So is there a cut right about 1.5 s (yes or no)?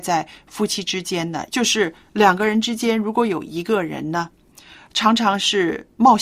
yes